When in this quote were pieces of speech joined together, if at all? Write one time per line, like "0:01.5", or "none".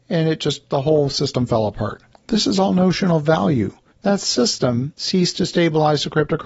0:02.1
0:03.9